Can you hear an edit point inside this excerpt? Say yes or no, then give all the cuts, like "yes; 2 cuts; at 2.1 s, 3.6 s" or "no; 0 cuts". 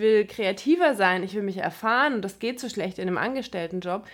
no; 0 cuts